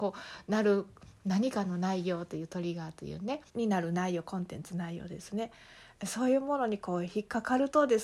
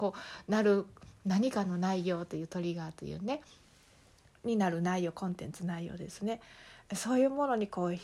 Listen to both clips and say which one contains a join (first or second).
first